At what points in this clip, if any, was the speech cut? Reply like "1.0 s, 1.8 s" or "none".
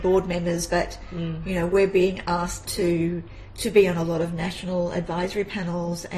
2.6 s